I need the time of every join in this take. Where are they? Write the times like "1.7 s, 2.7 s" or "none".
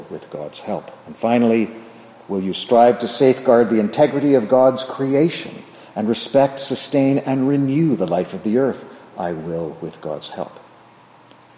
1.0 s